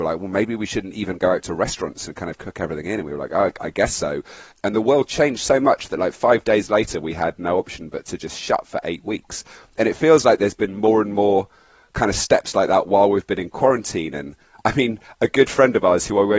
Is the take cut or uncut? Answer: cut